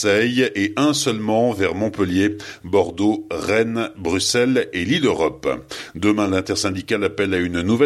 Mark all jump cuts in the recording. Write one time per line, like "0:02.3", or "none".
none

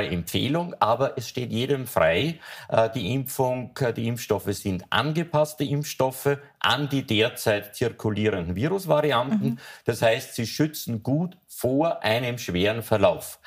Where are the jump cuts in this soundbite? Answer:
none

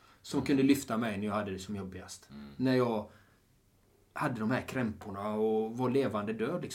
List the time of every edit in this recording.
none

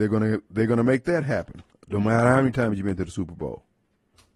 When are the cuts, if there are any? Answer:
0:01.7

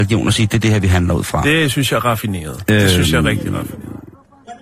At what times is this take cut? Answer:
none

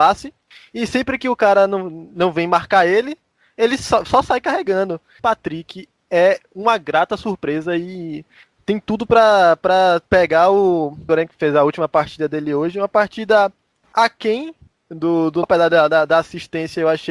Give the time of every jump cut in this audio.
0:05.2
0:11.1
0:15.4

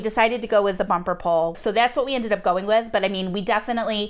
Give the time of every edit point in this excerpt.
0:01.5

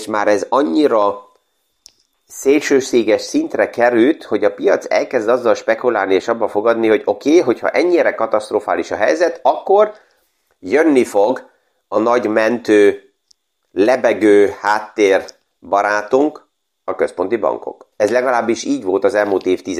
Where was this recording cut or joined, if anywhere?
0:17.9

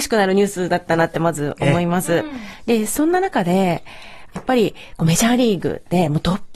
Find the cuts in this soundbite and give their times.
0:02.6
0:04.3

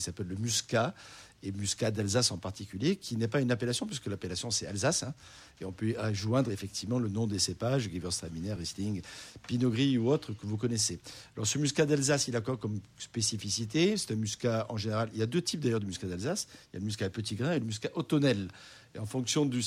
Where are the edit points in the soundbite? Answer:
none

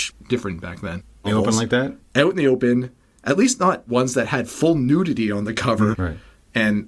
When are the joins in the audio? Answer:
0:01.2
0:05.9

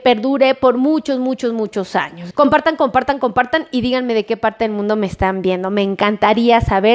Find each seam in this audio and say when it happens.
0:02.3

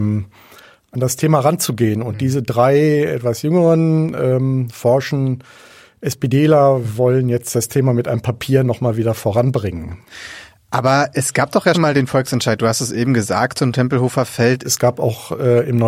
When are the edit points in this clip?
0:11.7
0:14.6

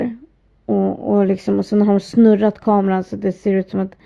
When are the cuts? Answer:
none

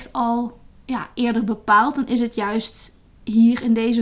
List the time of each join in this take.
none

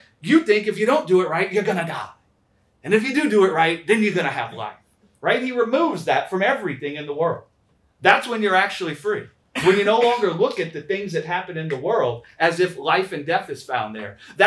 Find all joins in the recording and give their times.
none

